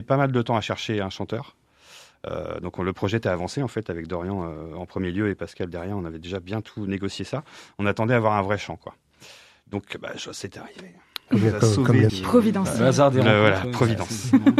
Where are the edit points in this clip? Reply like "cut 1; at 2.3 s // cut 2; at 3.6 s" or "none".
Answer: cut 1; at 12.1 s